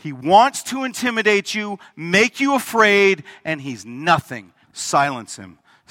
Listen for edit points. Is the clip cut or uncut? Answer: cut